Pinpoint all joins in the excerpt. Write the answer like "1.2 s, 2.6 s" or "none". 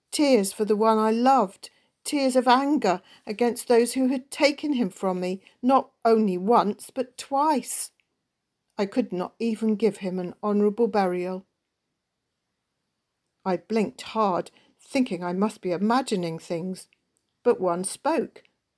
13.2 s